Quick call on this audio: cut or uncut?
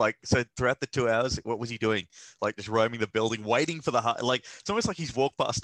uncut